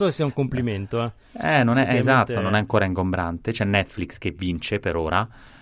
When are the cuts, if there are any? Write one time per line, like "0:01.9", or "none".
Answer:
none